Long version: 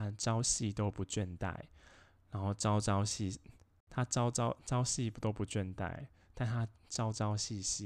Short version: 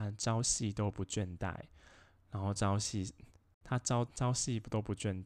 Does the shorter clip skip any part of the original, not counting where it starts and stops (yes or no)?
yes